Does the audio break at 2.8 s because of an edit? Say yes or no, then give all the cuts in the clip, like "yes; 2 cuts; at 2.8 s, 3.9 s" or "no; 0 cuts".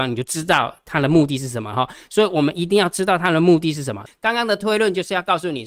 no; 1 cut; at 4.1 s